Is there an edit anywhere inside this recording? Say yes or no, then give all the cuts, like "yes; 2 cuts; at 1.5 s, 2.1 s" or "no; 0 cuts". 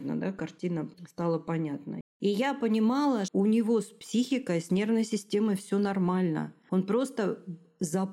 yes; 2 cuts; at 2.0 s, 3.3 s